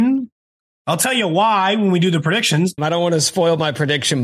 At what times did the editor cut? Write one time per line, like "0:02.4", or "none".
0:02.8